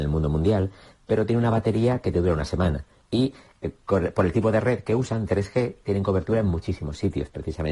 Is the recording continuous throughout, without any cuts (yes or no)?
no